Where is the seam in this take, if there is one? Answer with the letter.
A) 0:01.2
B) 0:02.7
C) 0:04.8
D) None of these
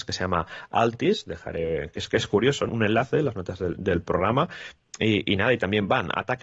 B